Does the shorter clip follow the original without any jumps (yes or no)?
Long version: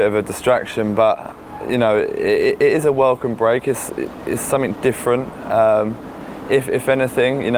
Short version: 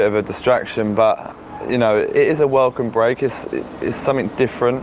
no